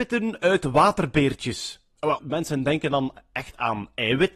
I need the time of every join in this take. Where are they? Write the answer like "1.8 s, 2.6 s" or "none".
2.2 s